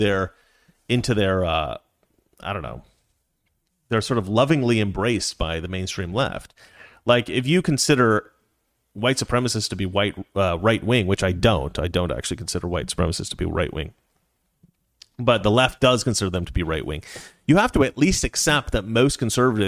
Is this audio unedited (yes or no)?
yes